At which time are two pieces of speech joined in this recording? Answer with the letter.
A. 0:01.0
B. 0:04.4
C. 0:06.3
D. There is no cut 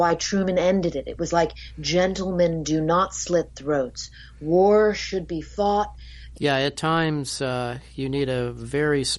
C